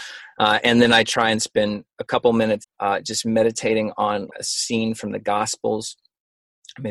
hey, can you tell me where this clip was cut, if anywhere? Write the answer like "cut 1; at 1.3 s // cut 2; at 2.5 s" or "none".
cut 1; at 2.6 s // cut 2; at 4.3 s